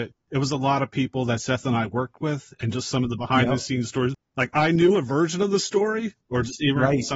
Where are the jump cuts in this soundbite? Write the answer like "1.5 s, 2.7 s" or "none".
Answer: 6.2 s

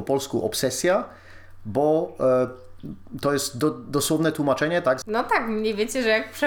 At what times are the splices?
5.0 s

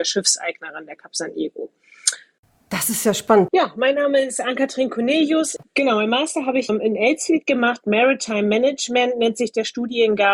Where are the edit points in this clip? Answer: 3.5 s, 5.6 s

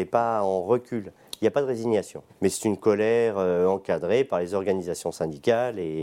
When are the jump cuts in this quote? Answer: 2.3 s

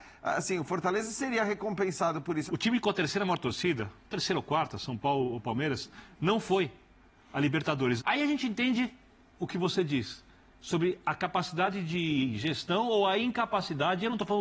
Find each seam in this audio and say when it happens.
2.5 s, 8.0 s

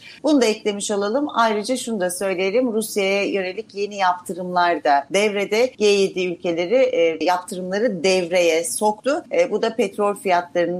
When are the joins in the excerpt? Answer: 7.2 s

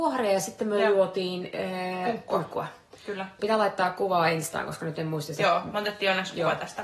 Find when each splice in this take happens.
3.4 s

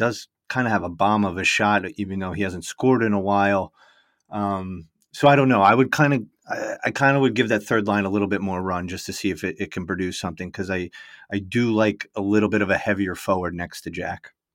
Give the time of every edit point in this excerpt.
none

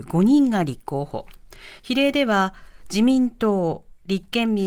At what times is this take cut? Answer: none

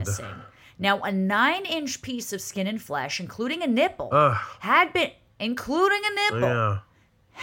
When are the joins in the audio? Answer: none

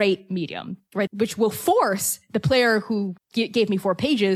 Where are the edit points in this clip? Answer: 1.1 s, 3.2 s

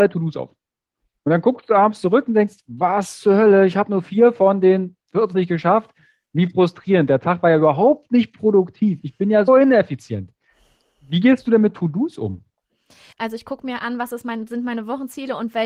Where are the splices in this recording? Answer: 9.5 s, 13.1 s

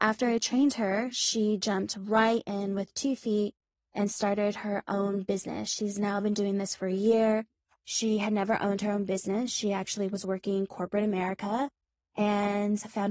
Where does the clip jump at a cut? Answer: 7.7 s

